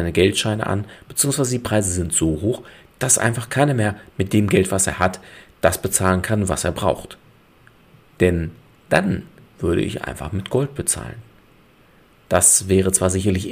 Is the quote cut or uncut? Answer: cut